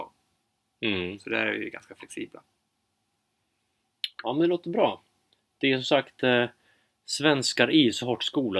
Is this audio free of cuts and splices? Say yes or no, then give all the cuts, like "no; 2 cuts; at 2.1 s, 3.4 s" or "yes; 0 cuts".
yes; 0 cuts